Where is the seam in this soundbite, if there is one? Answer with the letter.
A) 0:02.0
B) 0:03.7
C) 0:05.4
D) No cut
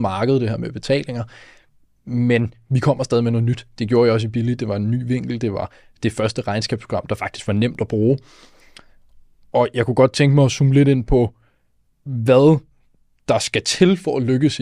D